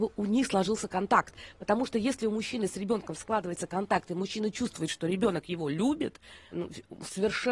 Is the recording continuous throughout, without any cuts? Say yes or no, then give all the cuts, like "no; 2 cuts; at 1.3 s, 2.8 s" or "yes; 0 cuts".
no; 1 cut; at 6.5 s